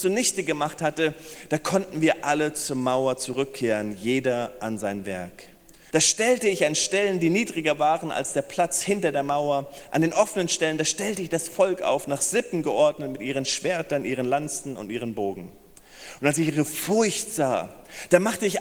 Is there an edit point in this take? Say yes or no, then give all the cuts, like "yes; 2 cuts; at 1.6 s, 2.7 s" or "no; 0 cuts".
yes; 1 cut; at 5.9 s